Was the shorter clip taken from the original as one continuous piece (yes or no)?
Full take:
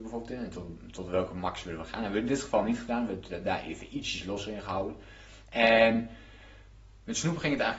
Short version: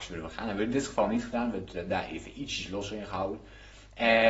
yes